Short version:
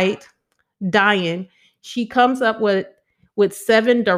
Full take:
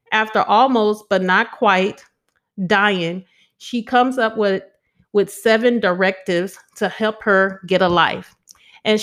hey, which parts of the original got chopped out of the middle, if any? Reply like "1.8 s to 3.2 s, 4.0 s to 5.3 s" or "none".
none